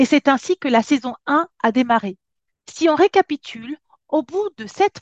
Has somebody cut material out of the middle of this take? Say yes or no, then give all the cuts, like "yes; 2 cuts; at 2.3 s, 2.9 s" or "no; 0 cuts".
no; 0 cuts